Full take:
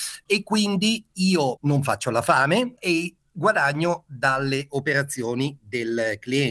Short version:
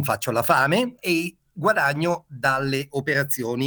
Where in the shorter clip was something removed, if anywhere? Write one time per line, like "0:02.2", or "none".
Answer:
none